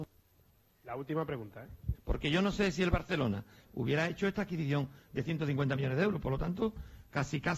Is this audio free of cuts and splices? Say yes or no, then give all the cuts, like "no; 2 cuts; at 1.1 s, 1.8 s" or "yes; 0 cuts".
no; 2 cuts; at 1.9 s, 3.6 s